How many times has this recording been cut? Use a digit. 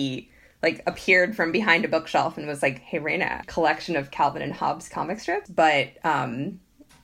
2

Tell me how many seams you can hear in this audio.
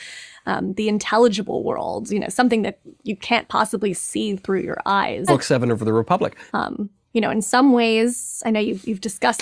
2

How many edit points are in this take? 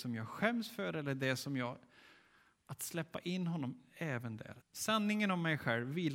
1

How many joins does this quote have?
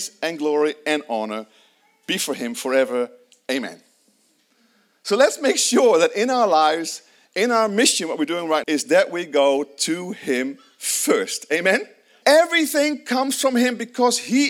2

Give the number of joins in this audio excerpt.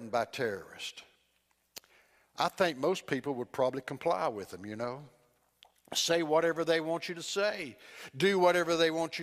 0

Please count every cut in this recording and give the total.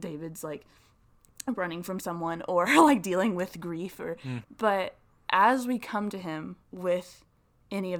2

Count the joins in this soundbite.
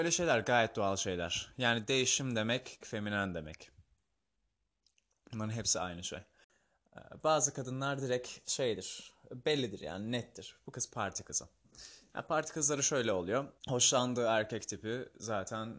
2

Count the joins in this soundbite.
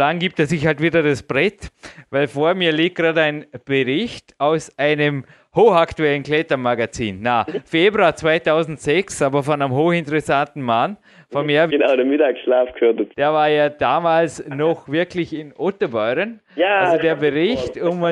2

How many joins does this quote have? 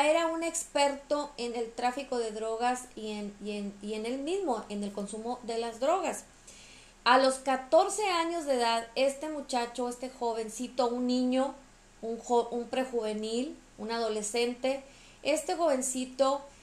1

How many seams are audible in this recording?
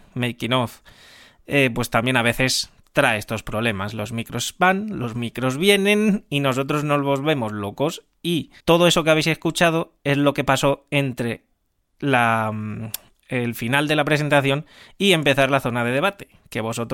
1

